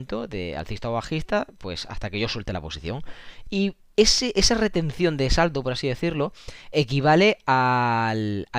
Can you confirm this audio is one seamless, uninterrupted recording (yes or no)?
no